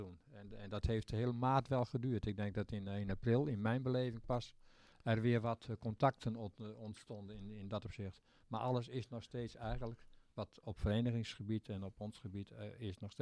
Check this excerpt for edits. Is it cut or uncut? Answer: uncut